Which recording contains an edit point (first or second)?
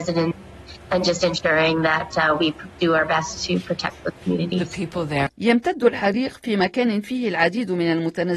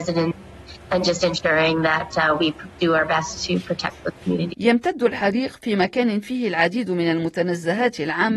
second